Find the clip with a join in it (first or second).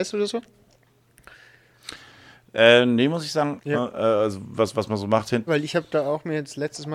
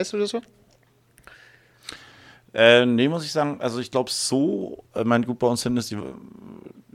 first